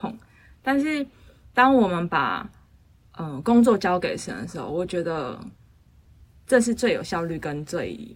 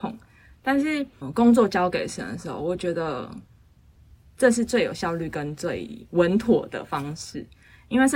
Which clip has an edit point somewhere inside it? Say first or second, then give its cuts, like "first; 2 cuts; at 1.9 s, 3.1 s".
second; 1 cut; at 1.2 s